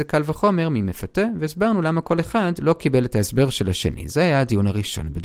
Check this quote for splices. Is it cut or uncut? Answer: cut